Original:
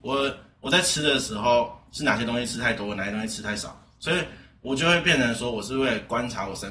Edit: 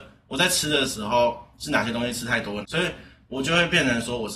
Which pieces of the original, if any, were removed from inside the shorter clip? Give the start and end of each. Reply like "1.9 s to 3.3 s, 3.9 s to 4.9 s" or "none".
2.9 s to 3.9 s